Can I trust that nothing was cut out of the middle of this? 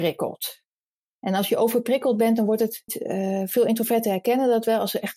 no; 1 cut; at 2.9 s

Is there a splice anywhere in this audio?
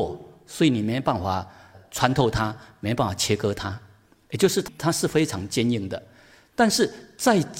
no; 0 cuts

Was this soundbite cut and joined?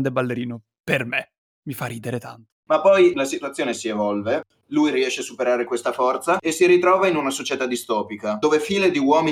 yes; 1 cut; at 2.6 s

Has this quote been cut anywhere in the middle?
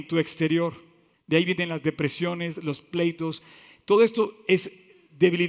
yes; 2 cuts; at 1.1 s, 2.5 s

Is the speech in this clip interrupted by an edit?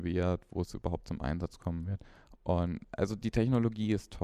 no; 0 cuts

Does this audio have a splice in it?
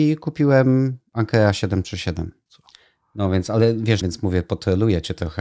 yes; 2 cuts; at 2.5 s, 4.0 s

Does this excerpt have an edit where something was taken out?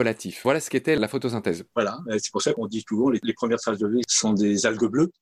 yes; 1 cut; at 1.7 s

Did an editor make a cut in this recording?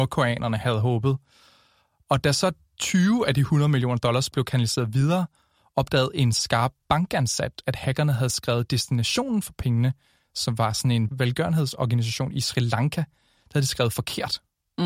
no; 0 cuts

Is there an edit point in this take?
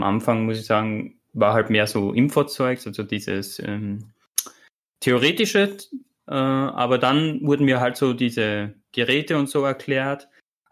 no; 0 cuts

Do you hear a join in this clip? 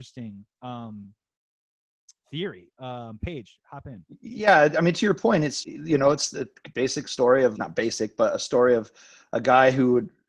yes; 2 cuts; at 5.6 s, 7.6 s

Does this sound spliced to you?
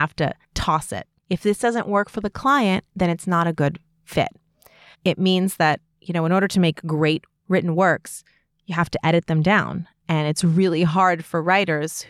yes; 2 cuts; at 1.2 s, 4.9 s

